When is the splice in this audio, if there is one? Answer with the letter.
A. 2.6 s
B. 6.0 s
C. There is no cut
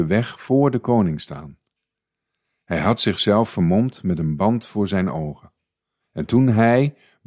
B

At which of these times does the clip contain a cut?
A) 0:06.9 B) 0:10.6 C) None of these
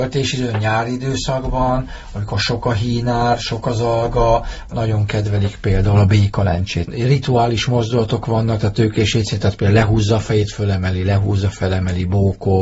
A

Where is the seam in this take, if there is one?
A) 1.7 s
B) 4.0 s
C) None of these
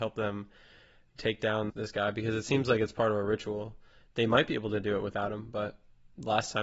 A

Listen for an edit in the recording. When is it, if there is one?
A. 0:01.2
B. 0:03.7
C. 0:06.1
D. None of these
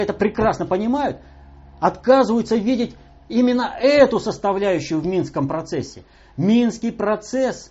D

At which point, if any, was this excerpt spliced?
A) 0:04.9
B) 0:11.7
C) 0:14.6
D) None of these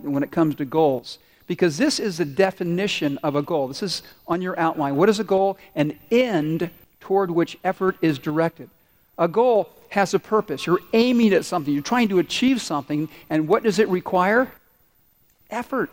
D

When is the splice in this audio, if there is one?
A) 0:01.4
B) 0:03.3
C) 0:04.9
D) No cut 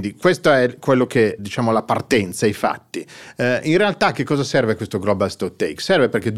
A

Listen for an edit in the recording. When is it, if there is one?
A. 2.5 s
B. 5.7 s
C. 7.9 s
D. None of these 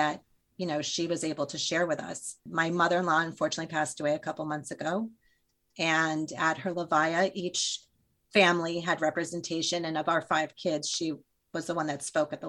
A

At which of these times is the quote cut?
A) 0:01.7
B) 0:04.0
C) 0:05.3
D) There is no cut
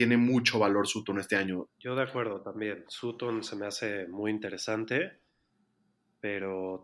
A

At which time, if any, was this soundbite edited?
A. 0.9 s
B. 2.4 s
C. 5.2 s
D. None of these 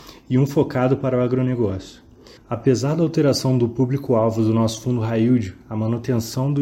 B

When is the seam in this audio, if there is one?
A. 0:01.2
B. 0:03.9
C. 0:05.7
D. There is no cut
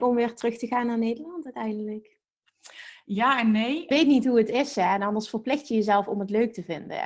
B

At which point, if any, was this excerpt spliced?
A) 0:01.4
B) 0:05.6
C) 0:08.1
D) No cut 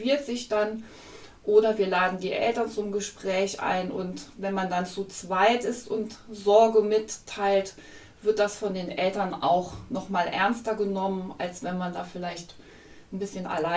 D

